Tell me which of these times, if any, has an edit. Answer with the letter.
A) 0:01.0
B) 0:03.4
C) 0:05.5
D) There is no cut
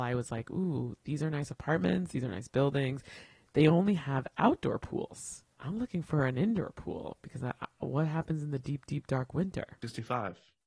C